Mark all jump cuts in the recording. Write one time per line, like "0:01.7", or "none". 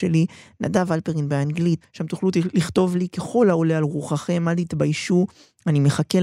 0:01.8